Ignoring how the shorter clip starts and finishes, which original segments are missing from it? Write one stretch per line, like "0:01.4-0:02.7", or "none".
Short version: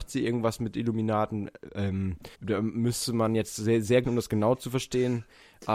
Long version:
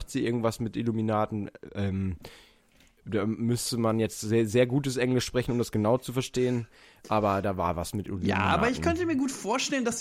0:02.3-0:03.0
0:04.7-0:05.5